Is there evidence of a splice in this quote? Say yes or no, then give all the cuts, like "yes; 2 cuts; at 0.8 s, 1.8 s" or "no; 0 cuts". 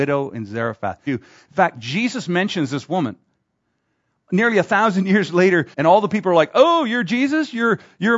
yes; 2 cuts; at 1.1 s, 5.7 s